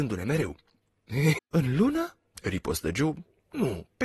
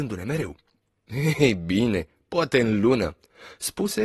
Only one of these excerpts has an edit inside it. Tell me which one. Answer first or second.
first